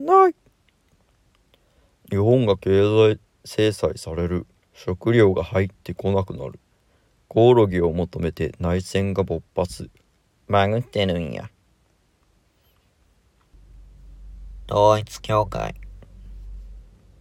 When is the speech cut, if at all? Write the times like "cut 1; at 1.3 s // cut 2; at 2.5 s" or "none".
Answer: cut 1; at 10.4 s